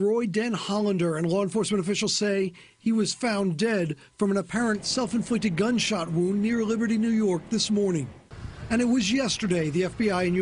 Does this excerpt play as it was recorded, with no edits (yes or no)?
yes